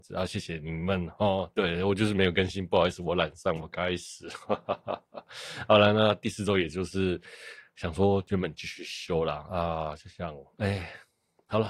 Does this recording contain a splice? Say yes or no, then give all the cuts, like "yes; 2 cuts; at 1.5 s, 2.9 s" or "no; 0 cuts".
no; 0 cuts